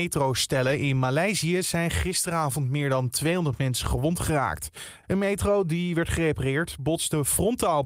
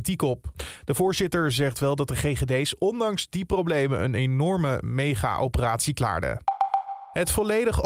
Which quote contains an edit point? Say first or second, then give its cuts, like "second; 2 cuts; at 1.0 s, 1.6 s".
first; 1 cut; at 5.0 s